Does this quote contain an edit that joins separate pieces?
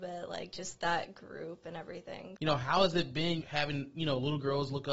yes; 2 cuts; at 2.4 s, 3.4 s

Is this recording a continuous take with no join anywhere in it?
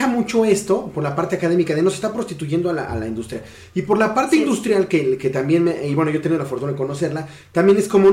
yes; 0 cuts

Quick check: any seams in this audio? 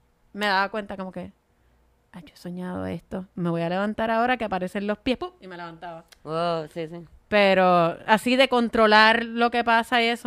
no; 0 cuts

